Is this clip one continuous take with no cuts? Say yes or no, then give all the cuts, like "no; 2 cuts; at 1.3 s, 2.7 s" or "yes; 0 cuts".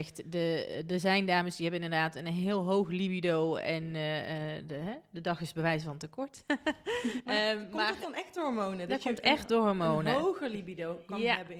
no; 1 cut; at 4.6 s